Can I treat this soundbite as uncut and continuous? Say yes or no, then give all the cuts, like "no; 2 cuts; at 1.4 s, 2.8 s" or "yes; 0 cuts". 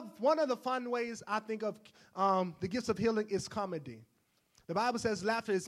yes; 0 cuts